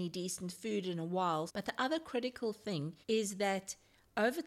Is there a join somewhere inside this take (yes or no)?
yes